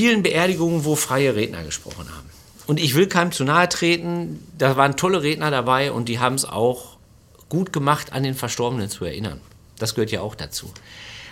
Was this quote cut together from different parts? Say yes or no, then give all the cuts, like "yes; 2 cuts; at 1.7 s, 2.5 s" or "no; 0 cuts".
no; 0 cuts